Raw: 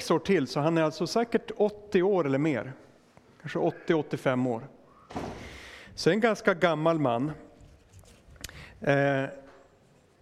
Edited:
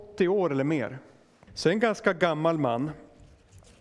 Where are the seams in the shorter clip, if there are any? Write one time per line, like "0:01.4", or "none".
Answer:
0:01.5